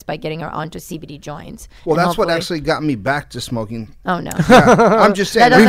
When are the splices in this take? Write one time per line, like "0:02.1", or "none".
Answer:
0:01.8